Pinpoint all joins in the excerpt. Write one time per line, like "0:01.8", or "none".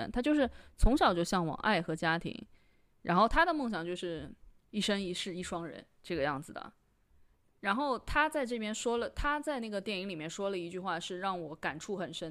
0:04.6